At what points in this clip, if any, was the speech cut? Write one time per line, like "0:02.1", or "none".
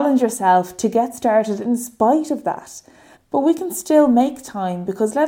0:03.1